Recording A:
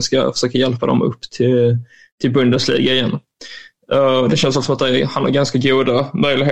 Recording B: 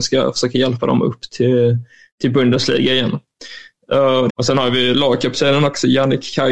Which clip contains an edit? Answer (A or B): B